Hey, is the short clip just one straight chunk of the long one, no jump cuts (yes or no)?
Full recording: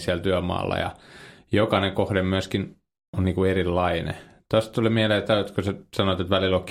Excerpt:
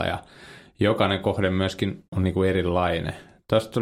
no